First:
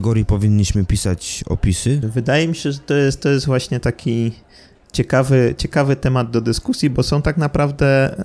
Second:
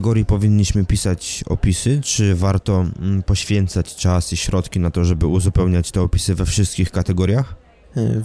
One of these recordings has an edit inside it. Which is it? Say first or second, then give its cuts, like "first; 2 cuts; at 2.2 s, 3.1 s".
first; 1 cut; at 2.0 s